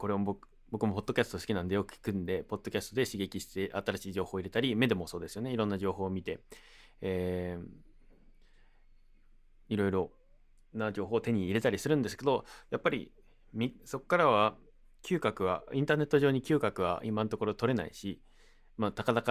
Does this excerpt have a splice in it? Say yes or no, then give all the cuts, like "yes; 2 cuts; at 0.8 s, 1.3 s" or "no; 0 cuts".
no; 0 cuts